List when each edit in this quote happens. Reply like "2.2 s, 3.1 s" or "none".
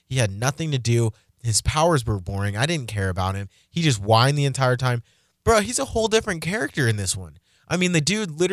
none

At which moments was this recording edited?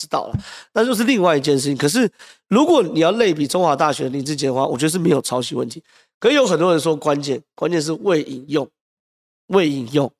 none

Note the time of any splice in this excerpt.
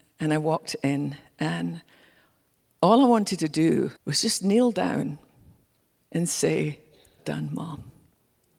4.0 s, 7.2 s

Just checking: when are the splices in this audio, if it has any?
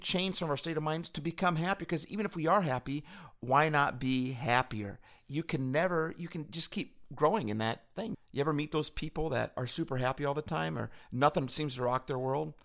8.1 s

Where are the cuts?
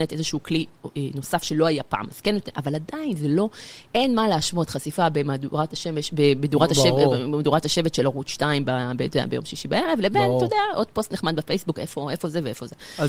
none

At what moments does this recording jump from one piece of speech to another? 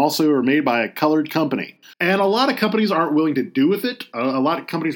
1.9 s

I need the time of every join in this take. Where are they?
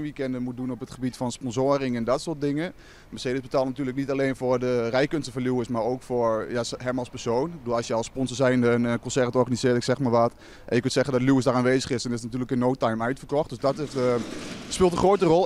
none

